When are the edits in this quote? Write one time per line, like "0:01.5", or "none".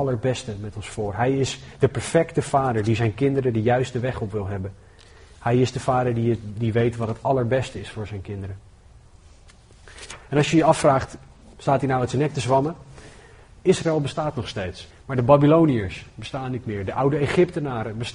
0:14.9